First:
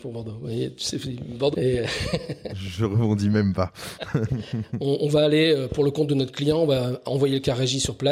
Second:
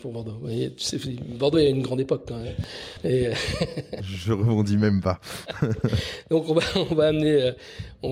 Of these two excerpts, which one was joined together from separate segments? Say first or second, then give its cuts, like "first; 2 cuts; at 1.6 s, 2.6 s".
first; 2 cuts; at 1.5 s, 4.3 s